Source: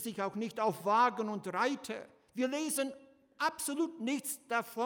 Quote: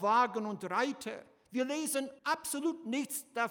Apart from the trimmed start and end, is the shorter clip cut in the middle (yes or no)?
yes